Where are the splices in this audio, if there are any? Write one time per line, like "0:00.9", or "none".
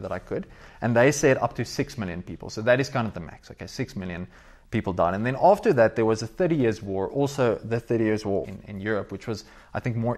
0:08.4